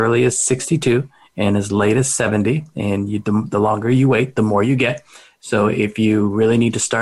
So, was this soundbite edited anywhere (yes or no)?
no